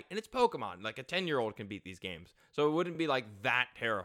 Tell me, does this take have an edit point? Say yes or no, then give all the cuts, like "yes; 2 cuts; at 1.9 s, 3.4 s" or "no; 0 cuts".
no; 0 cuts